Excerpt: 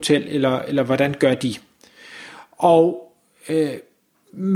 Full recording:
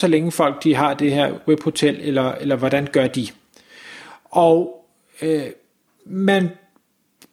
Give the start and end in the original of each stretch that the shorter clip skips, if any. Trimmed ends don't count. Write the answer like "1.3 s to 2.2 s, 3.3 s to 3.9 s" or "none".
none